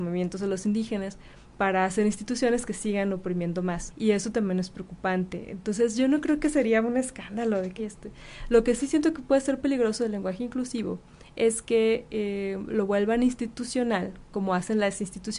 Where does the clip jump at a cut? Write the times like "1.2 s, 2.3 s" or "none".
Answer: 3.9 s, 7.8 s